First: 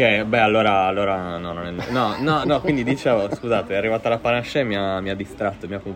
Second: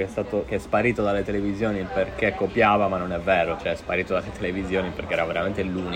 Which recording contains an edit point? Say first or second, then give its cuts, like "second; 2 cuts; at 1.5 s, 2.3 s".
first; 1 cut; at 2.4 s